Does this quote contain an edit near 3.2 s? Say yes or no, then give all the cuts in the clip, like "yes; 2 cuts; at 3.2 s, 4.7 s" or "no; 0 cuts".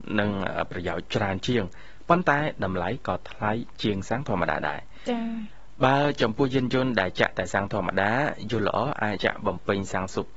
no; 1 cut; at 9.2 s